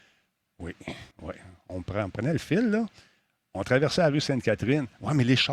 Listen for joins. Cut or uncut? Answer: cut